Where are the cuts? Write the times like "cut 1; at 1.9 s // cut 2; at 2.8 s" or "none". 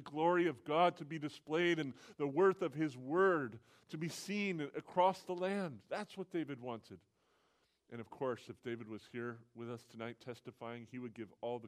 cut 1; at 7.8 s